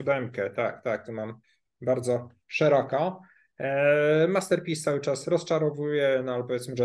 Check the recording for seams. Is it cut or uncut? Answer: uncut